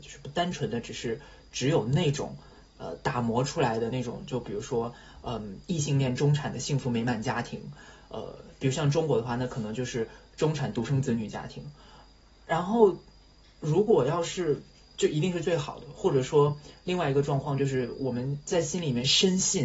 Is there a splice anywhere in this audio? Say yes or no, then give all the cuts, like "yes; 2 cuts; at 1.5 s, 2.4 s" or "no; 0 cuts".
no; 0 cuts